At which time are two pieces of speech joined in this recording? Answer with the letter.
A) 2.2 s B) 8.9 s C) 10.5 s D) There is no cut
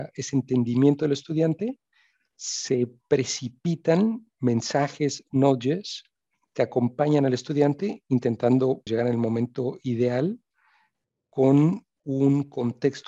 B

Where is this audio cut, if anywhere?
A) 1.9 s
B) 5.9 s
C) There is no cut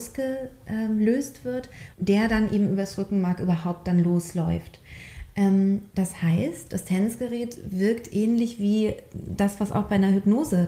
A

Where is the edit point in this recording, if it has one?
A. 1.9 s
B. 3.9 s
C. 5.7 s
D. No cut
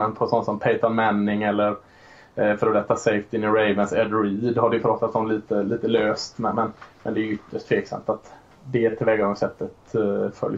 D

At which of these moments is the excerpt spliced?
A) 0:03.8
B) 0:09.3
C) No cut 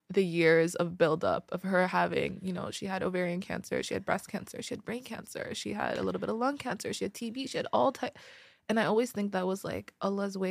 B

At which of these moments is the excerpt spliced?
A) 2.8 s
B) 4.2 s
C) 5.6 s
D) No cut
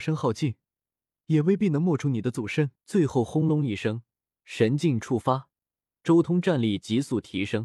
A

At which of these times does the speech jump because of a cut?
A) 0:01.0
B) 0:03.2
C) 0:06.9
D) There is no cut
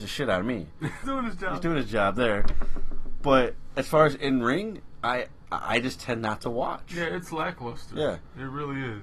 A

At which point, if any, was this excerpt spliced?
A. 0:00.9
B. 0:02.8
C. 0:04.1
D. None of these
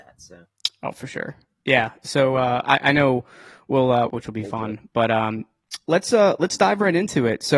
C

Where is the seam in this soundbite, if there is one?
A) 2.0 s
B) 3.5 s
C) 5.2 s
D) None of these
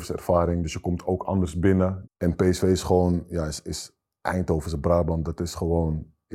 A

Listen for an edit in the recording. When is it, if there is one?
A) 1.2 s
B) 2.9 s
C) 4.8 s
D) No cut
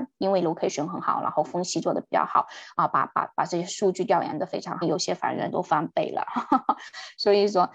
C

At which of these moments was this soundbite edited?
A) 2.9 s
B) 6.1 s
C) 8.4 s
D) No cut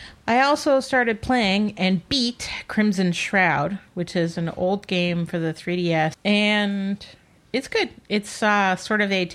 B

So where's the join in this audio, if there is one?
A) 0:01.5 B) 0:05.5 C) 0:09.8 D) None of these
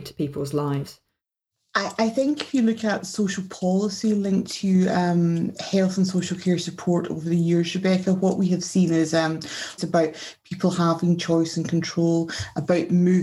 C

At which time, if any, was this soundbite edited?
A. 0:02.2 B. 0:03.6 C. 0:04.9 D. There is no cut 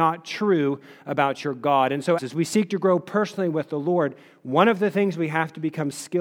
A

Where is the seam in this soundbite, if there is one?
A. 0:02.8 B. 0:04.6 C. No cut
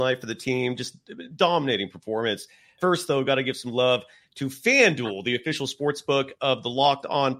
A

